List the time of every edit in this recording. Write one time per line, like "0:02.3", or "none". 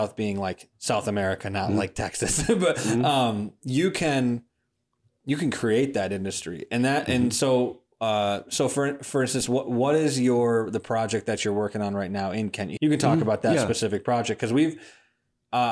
0:12.8